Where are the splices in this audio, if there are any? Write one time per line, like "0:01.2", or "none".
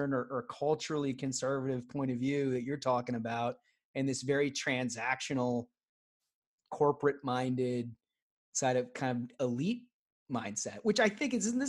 none